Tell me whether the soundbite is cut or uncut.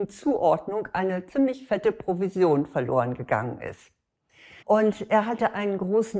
cut